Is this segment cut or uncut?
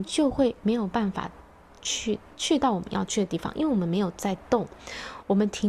uncut